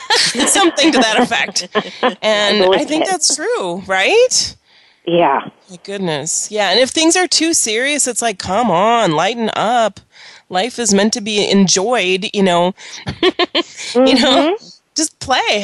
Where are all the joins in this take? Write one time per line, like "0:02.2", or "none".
0:13.1